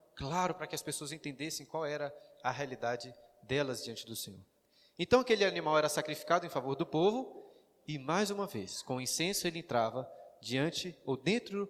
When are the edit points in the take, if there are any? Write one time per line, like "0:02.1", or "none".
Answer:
none